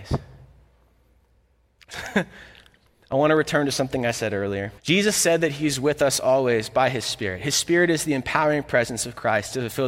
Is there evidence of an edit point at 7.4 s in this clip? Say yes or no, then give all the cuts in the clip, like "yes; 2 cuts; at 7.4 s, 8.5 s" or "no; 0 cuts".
no; 2 cuts; at 1.9 s, 4.8 s